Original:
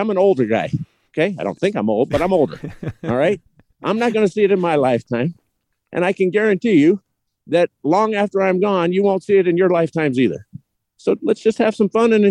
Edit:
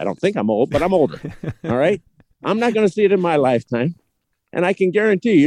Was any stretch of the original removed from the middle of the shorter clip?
no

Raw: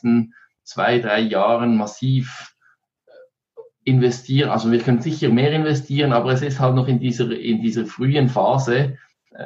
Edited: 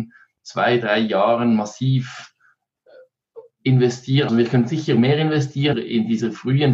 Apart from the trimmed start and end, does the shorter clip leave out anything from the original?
yes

